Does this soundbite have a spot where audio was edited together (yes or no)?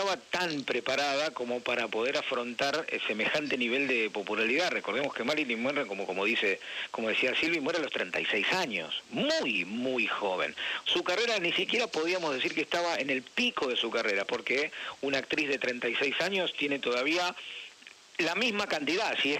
yes